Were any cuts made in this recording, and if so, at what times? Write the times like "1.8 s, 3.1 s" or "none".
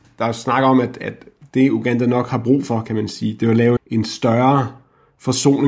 3.8 s